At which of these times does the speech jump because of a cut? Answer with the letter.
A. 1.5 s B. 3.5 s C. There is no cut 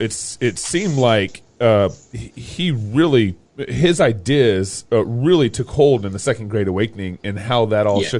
B